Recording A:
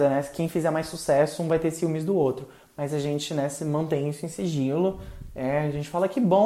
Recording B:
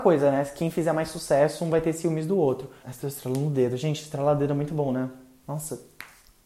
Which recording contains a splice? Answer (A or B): B